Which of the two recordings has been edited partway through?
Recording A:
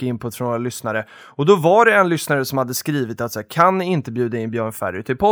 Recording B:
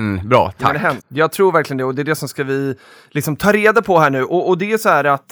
B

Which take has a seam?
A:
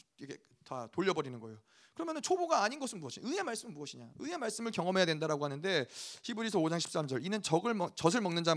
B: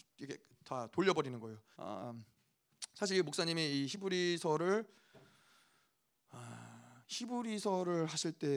B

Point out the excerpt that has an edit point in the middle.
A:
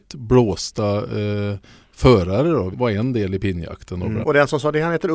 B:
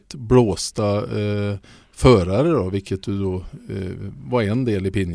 A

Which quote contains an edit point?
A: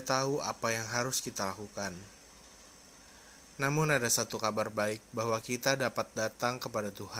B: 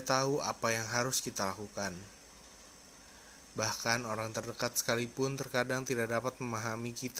A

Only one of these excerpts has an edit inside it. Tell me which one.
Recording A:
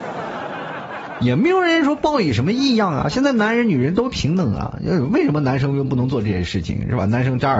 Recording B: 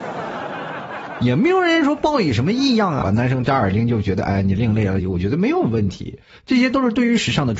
B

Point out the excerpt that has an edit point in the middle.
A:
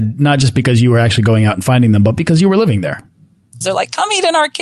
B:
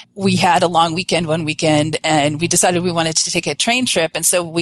A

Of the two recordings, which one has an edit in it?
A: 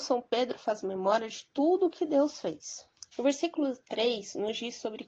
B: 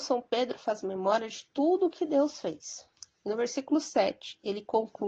A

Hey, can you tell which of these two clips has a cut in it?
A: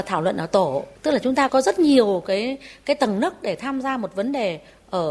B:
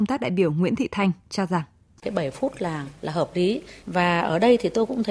A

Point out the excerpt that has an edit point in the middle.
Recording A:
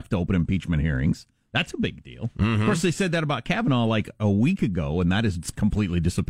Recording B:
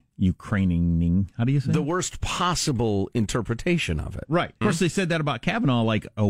B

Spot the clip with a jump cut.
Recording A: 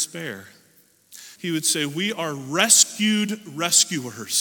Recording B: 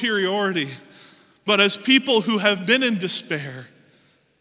A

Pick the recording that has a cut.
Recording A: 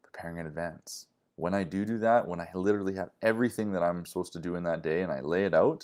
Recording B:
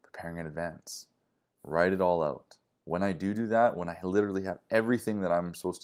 A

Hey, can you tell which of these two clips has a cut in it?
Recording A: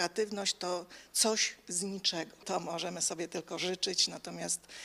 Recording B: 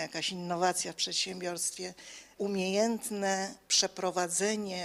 A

